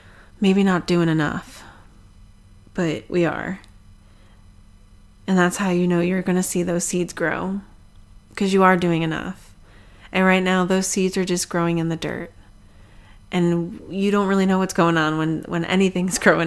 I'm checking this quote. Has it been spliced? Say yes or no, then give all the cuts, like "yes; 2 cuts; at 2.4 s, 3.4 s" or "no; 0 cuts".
yes; 1 cut; at 8.2 s